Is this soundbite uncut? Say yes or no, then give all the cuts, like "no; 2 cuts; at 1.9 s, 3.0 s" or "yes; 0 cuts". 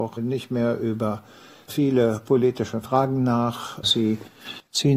no; 1 cut; at 3.8 s